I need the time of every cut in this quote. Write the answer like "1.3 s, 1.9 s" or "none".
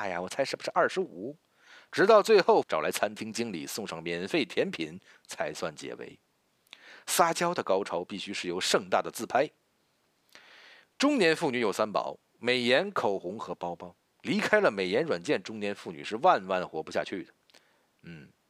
2.6 s